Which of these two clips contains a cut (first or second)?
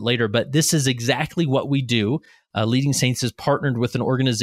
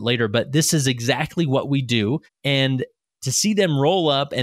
second